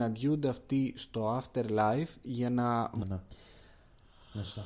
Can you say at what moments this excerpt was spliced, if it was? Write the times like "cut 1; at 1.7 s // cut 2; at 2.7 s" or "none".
cut 1; at 3.0 s